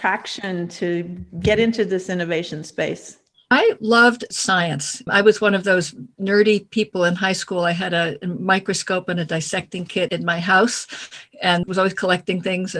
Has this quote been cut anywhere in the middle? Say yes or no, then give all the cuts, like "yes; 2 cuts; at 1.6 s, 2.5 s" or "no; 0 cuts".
no; 0 cuts